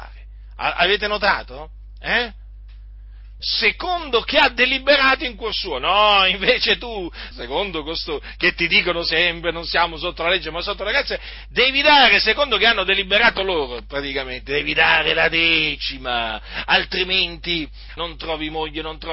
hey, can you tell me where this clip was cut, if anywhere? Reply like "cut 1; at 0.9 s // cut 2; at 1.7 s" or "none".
cut 1; at 3.4 s // cut 2; at 7.3 s // cut 3; at 18.0 s